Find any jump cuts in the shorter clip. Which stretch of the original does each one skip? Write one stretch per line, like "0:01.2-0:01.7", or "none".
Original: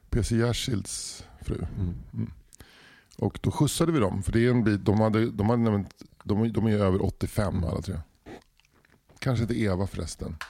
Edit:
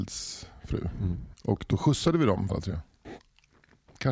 0:02.1-0:03.1
0:04.2-0:07.7